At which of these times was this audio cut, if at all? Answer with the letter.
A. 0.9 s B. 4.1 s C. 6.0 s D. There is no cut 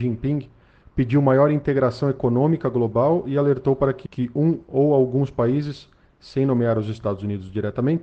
B